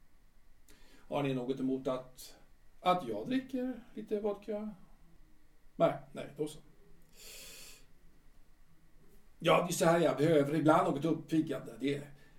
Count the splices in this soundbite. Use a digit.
0